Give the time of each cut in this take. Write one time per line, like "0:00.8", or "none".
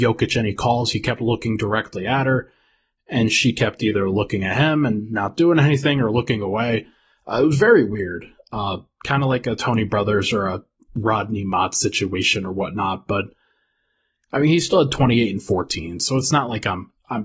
none